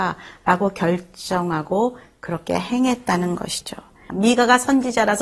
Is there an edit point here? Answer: yes; 1 cut; at 4.1 s

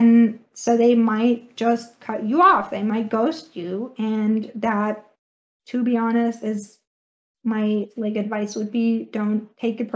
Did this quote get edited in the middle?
no; 0 cuts

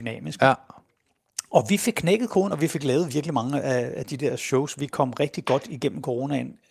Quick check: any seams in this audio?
no; 0 cuts

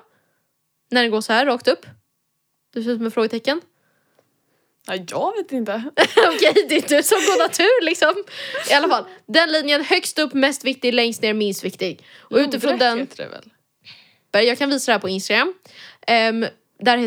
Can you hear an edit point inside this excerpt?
yes; 1 cut; at 14.3 s

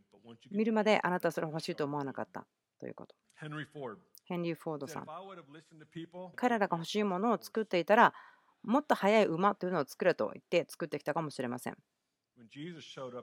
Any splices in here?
yes; 2 cuts; at 3.2 s, 6.3 s

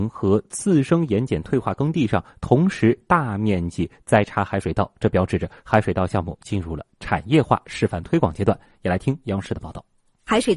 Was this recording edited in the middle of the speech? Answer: no; 0 cuts

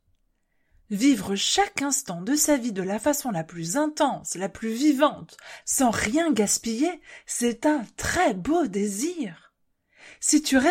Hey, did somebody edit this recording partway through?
yes; 1 cut; at 5.6 s

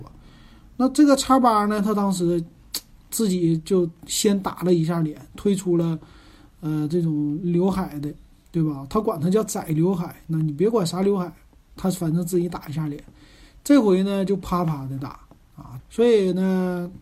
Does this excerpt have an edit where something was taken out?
yes; 1 cut; at 15.8 s

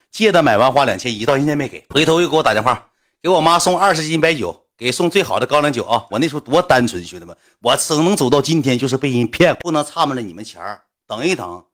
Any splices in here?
yes; 2 cuts; at 6.1 s, 9.6 s

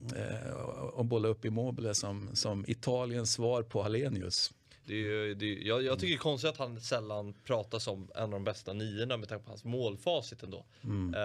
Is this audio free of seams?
no; 1 cut; at 4.8 s

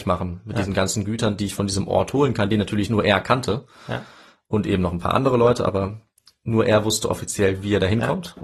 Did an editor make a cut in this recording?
no; 0 cuts

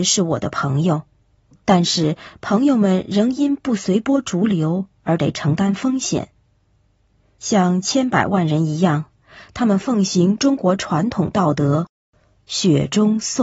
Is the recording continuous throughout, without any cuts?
no; 1 cut; at 1.5 s

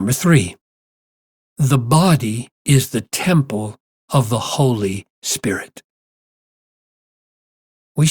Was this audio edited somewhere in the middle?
no; 0 cuts

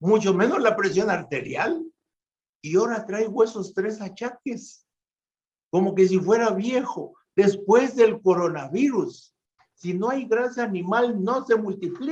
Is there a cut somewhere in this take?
yes; 1 cut; at 9.6 s

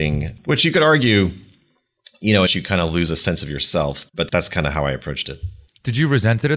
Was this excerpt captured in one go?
no; 1 cut; at 2.5 s

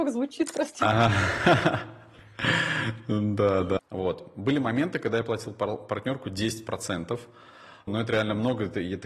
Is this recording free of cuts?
no; 2 cuts; at 3.8 s, 7.9 s

